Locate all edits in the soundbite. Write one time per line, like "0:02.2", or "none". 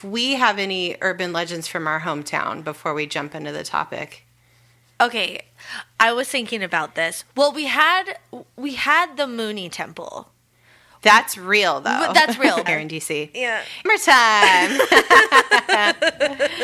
0:12.7
0:13.9